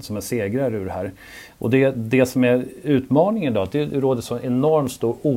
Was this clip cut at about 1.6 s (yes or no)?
no